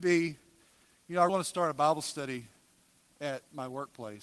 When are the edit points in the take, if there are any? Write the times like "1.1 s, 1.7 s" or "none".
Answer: 1.3 s